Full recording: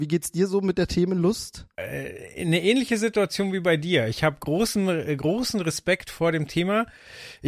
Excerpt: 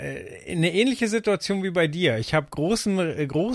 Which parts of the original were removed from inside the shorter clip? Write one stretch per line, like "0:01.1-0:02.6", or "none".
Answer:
none